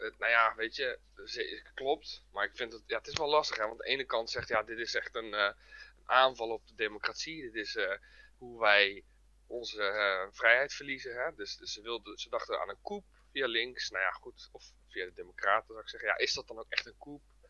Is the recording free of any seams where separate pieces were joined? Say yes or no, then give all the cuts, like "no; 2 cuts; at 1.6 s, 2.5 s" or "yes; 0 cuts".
yes; 0 cuts